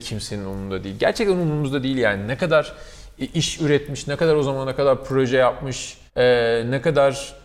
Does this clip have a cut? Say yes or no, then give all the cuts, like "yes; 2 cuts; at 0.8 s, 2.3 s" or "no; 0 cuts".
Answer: yes; 1 cut; at 6.1 s